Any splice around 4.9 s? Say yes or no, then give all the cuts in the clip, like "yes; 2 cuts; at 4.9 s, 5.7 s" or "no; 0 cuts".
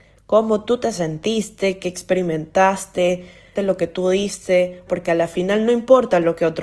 yes; 2 cuts; at 3.6 s, 4.9 s